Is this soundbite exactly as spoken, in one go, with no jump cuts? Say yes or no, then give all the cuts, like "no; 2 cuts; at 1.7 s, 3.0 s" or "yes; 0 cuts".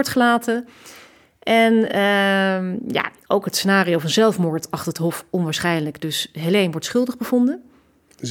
yes; 0 cuts